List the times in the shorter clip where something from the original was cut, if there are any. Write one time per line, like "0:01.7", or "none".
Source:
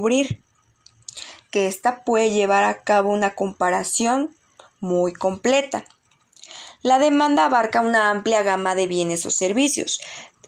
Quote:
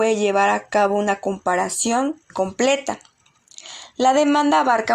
0:02.3